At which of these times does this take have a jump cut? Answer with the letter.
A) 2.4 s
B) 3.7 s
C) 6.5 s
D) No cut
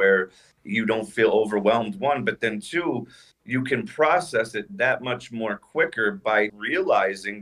C